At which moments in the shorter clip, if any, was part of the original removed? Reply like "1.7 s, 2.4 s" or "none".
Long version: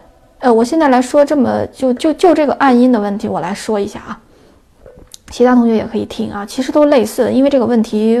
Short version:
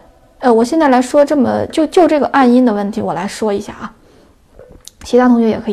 1.7 s